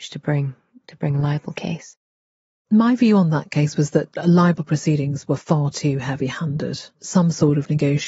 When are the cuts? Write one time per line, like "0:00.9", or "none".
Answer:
0:06.9